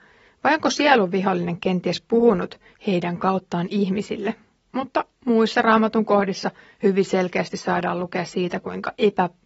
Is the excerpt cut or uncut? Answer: uncut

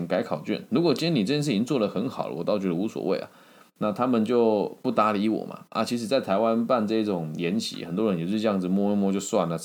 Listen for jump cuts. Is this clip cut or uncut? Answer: uncut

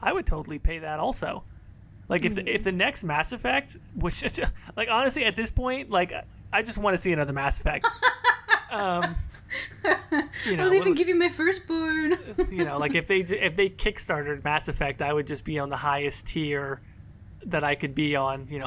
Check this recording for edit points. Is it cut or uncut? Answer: cut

